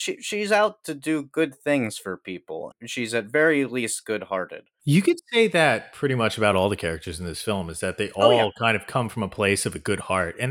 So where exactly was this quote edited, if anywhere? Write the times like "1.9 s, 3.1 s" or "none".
none